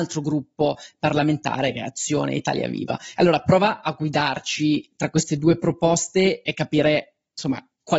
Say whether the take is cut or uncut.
uncut